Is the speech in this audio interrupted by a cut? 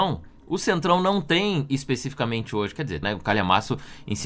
yes; 1 cut; at 3.0 s

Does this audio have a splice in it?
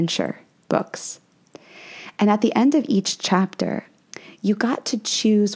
no; 0 cuts

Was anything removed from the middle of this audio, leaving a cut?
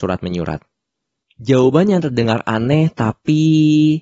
yes; 1 cut; at 1.2 s

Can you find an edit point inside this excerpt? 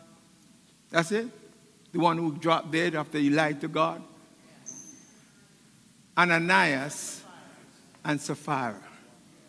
no; 0 cuts

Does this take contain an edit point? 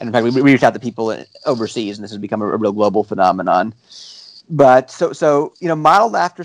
no; 0 cuts

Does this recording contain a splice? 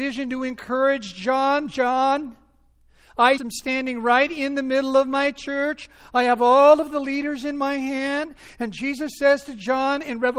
yes; 1 cut; at 3.4 s

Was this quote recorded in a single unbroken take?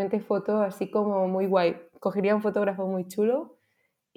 yes; 0 cuts

